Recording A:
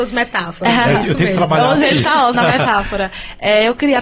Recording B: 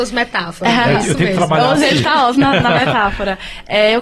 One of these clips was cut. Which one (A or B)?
A